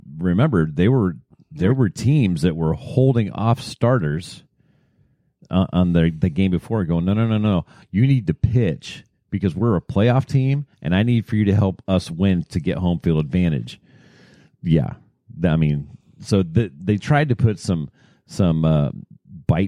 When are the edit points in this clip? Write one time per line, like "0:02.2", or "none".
none